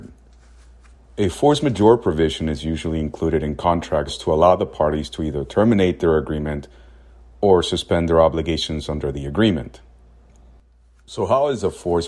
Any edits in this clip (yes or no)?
yes